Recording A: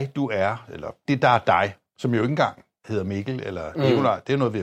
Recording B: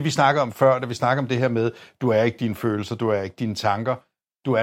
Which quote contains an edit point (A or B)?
A